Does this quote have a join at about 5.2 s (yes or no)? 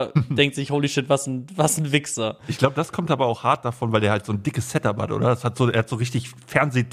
no